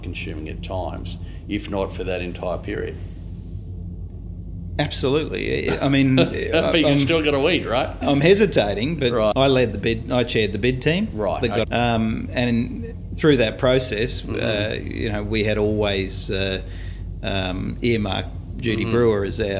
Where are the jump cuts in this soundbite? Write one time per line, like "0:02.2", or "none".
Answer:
0:09.3
0:11.6